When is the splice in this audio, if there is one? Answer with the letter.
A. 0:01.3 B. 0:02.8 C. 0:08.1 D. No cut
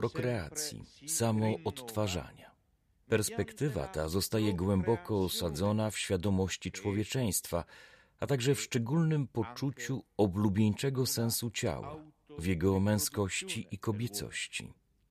D